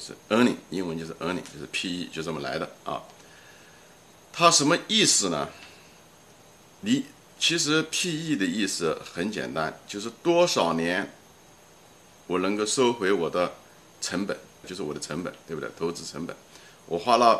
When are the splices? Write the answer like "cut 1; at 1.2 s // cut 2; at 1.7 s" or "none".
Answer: cut 1; at 14.6 s